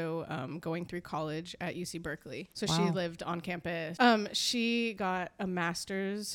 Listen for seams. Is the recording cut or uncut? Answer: cut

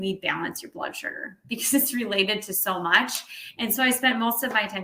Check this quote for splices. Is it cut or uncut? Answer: uncut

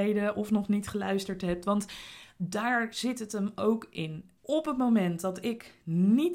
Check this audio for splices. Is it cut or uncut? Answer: cut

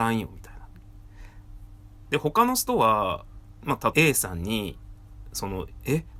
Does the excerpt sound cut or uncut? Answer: cut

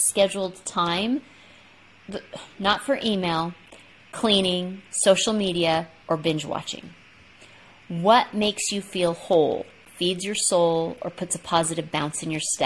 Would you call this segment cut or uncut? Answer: uncut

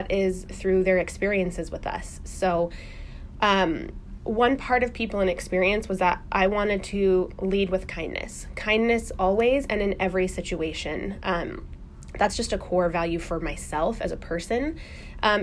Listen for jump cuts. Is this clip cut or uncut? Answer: uncut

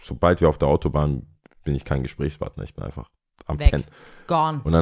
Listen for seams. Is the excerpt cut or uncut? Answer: uncut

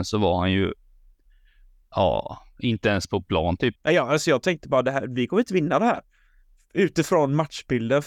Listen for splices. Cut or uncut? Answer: cut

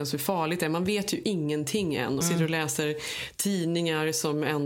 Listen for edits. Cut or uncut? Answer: cut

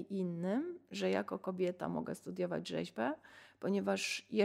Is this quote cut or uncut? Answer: uncut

